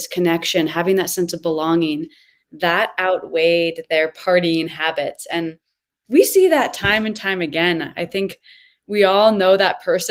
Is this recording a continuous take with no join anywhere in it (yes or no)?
yes